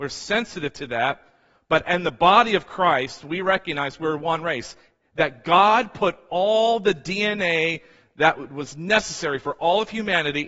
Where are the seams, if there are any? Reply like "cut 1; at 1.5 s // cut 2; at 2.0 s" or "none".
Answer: none